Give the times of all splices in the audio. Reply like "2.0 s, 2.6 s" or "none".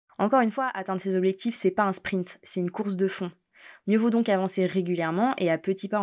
none